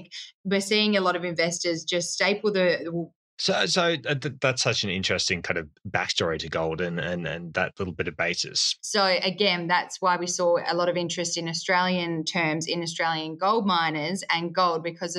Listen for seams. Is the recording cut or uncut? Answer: cut